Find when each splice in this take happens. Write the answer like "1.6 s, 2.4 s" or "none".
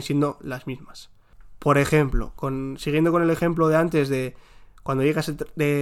none